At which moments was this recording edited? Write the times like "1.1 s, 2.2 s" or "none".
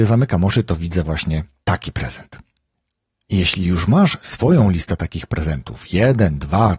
none